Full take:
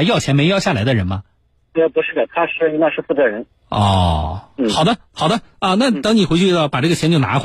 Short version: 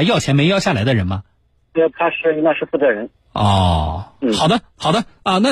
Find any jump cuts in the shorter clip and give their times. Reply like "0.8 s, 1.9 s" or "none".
1.9 s